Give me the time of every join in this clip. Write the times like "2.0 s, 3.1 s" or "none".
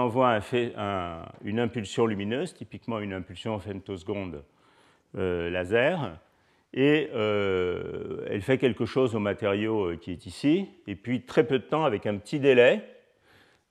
none

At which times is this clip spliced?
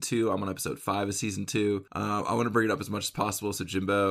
1.9 s

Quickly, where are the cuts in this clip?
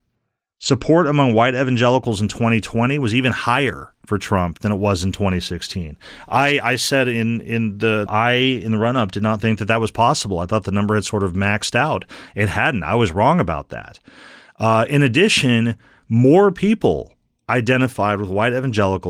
8.1 s

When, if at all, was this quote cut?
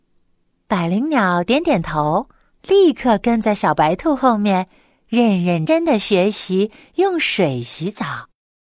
5.7 s

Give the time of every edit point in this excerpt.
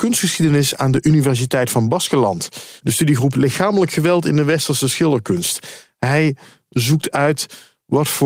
2.8 s

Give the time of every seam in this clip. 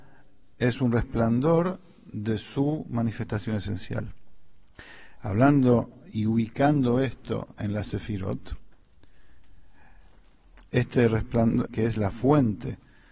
10.7 s, 11.7 s

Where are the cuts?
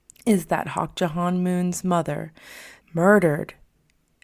2.8 s

